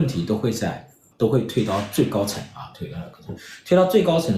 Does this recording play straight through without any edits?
no; 1 cut; at 1.1 s

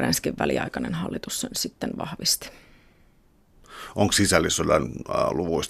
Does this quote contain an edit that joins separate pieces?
no; 0 cuts

